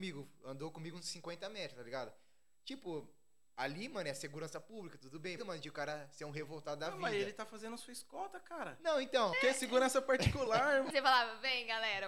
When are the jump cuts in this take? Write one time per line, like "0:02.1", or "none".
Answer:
0:05.4
0:09.3
0:10.9